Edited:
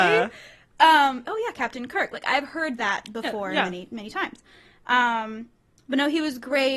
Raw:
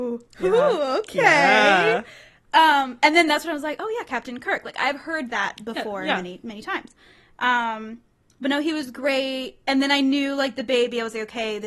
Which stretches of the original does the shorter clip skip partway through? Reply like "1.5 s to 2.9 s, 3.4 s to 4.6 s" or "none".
3.0 s to 3.8 s